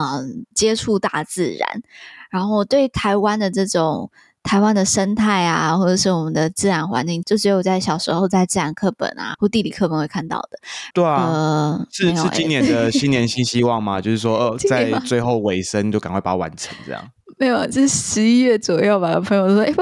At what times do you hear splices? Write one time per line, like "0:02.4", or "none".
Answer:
0:07.2
0:09.3
0:10.9